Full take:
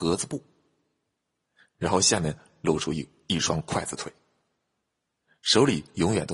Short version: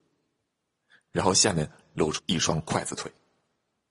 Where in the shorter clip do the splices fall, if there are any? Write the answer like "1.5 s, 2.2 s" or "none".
2.2 s